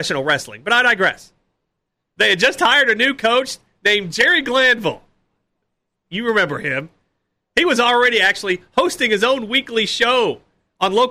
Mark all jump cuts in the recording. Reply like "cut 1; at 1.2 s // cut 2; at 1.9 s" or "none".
cut 1; at 2.0 s